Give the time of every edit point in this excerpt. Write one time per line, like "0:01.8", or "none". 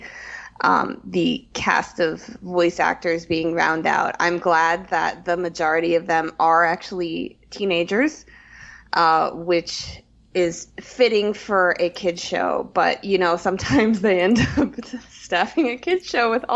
none